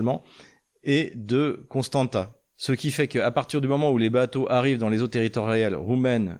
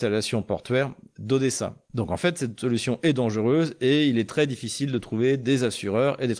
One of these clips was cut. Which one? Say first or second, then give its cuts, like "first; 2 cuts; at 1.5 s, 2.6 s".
first; 1 cut; at 2.5 s